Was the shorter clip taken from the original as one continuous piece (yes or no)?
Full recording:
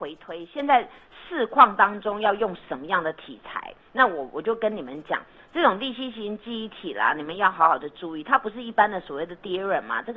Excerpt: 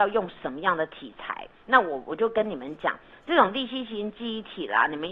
yes